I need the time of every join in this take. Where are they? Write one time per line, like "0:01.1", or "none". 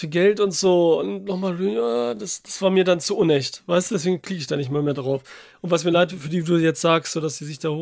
none